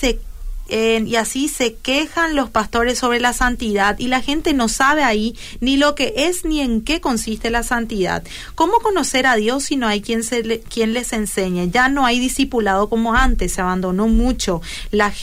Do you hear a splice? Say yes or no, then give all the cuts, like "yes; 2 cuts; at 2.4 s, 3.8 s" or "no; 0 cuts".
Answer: no; 0 cuts